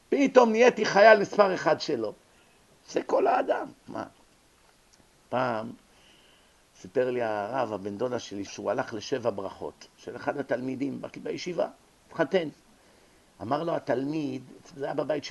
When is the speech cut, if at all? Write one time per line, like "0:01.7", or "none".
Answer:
0:03.9
0:08.5